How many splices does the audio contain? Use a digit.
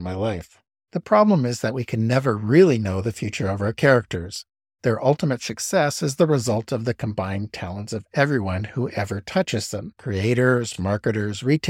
0